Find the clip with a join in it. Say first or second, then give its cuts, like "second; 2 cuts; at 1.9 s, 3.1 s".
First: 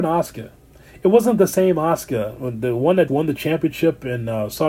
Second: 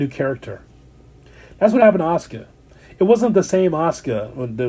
first; 1 cut; at 3.1 s